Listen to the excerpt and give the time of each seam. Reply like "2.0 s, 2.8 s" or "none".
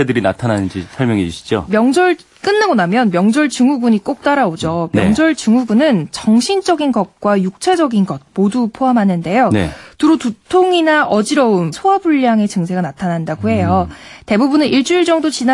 11.7 s

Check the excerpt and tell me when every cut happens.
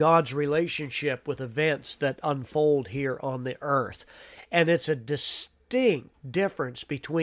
none

